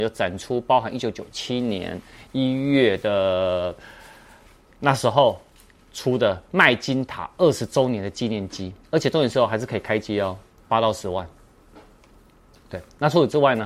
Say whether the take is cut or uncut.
cut